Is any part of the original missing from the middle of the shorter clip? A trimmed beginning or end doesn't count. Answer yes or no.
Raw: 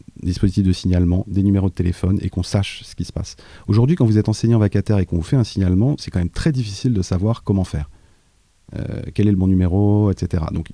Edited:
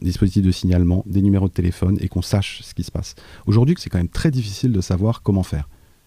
yes